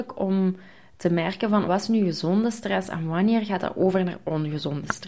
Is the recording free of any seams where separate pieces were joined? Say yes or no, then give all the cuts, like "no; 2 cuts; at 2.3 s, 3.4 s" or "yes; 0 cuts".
no; 1 cut; at 1.7 s